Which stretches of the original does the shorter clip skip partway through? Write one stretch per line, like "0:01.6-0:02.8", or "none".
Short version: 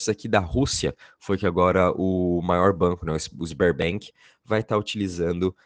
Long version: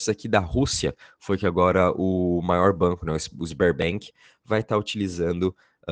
none